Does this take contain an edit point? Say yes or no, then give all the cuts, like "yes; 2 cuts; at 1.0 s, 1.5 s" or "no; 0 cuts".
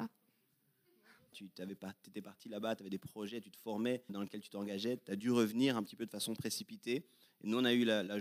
yes; 2 cuts; at 1.3 s, 4.1 s